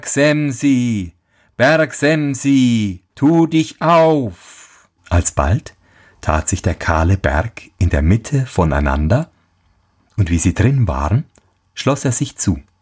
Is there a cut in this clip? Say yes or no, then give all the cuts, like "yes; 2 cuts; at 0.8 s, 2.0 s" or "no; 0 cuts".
yes; 3 cuts; at 3.1 s, 5.0 s, 10.0 s